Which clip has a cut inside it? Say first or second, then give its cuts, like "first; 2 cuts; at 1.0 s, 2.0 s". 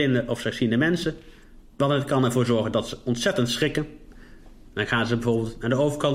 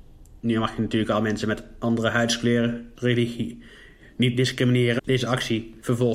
second; 2 cuts; at 3.0 s, 5.0 s